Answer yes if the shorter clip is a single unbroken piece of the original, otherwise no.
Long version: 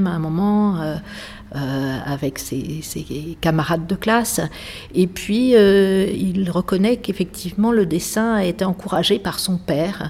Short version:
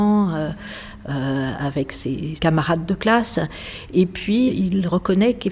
no